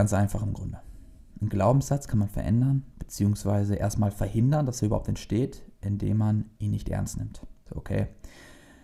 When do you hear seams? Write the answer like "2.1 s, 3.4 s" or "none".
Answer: 7.7 s